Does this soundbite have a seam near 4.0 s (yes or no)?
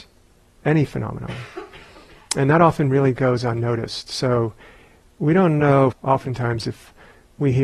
no